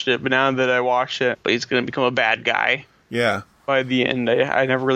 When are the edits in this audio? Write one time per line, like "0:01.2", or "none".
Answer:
0:01.3